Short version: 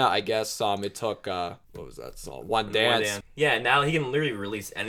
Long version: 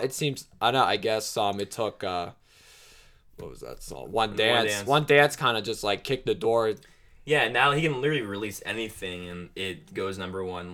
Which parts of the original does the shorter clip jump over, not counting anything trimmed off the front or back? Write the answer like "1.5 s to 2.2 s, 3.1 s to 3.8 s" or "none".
2.4 s to 3.3 s, 4.8 s to 7.1 s